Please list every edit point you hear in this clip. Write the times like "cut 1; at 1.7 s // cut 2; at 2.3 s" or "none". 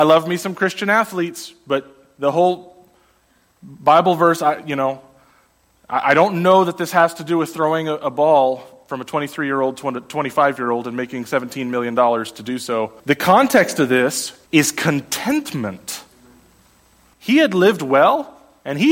cut 1; at 13.0 s // cut 2; at 14.5 s // cut 3; at 17.1 s